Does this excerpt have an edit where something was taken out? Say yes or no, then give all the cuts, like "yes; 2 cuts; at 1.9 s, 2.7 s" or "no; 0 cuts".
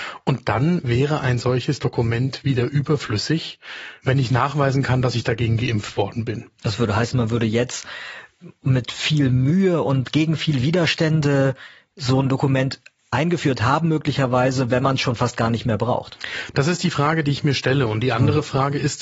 no; 0 cuts